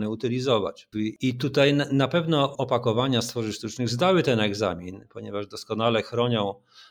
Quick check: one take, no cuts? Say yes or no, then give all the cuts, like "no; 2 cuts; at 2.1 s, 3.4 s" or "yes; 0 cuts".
no; 1 cut; at 0.9 s